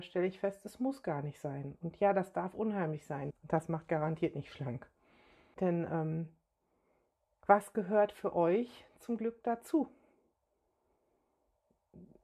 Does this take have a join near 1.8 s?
no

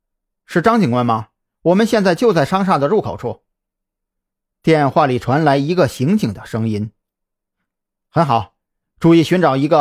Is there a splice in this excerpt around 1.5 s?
yes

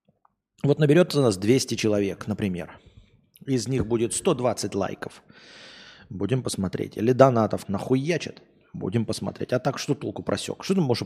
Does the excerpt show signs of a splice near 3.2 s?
no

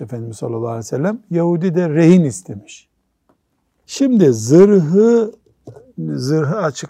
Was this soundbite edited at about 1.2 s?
no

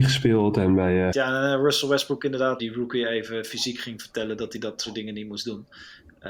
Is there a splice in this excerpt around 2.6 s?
yes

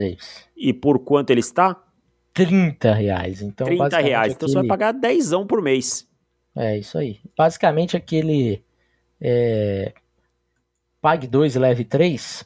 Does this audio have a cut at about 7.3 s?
no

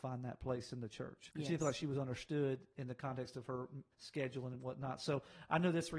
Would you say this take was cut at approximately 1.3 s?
yes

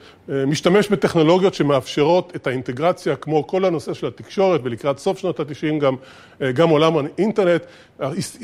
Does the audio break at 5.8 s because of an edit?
no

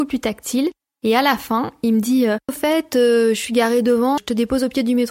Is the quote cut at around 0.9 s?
no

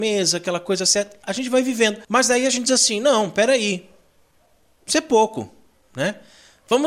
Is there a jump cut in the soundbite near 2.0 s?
yes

